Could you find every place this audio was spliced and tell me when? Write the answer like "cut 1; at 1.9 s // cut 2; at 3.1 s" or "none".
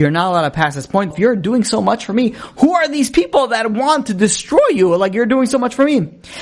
cut 1; at 1.1 s